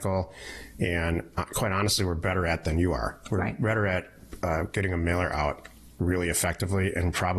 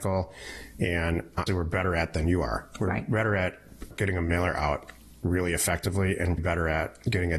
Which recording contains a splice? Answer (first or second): second